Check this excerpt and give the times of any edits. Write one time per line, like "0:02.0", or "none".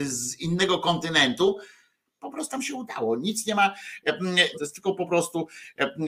0:02.2
0:04.5